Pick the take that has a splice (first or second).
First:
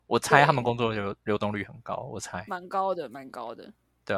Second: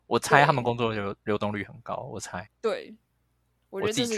second